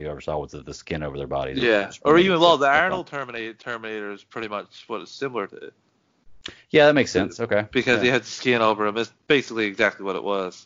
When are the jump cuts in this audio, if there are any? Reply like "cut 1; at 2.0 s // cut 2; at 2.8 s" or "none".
none